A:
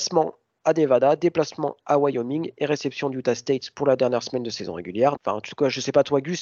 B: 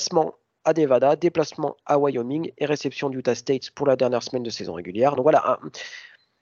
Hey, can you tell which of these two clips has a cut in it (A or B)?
A